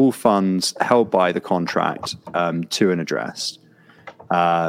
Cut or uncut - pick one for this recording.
uncut